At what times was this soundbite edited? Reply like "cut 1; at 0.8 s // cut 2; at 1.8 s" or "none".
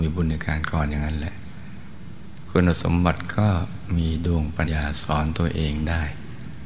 cut 1; at 4.6 s